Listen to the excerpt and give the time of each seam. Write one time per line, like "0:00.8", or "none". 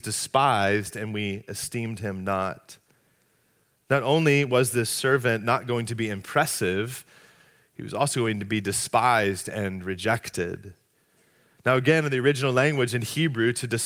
none